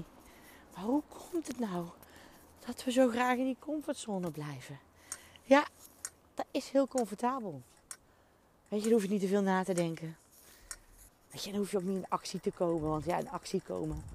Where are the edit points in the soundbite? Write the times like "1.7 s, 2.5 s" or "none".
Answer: 11.1 s